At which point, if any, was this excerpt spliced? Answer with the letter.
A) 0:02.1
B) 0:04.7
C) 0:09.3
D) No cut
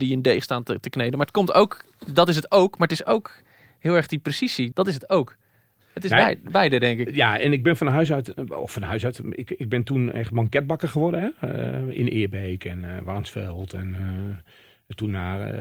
B